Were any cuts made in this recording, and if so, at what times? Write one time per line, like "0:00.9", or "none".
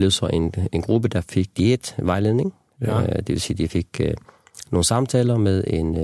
none